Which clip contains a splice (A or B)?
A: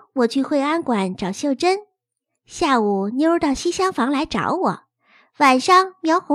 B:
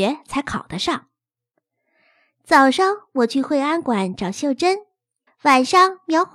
B